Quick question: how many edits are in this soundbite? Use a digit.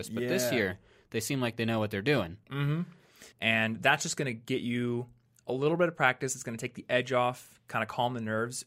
1